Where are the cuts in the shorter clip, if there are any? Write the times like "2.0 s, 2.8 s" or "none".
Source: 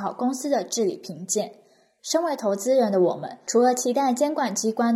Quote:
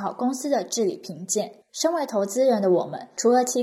1.6 s